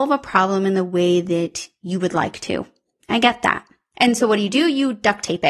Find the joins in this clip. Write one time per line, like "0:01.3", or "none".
0:03.9